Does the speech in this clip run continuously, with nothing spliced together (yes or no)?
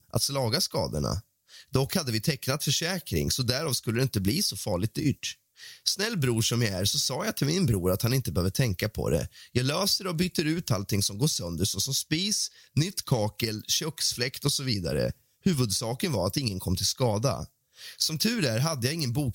yes